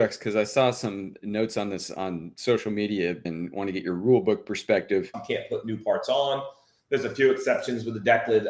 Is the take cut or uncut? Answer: cut